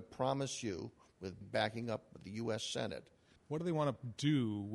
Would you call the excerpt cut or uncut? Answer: cut